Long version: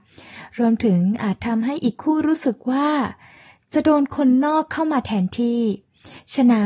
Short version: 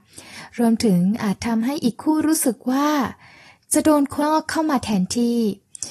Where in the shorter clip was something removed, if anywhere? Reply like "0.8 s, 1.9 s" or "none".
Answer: 4.2 s